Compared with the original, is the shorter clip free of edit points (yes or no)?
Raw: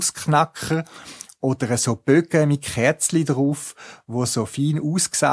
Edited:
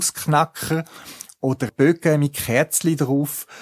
no